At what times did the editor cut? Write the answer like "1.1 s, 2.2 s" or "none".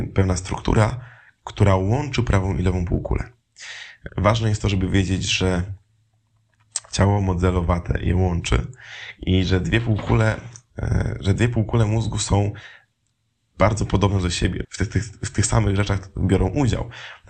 4.1 s, 14.6 s